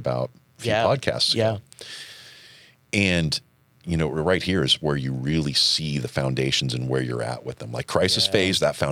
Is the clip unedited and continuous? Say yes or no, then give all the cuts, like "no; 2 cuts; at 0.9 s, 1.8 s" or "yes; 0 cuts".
yes; 0 cuts